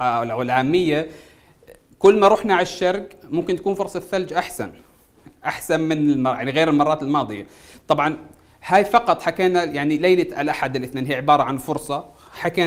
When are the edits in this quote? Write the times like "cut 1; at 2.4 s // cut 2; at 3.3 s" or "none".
none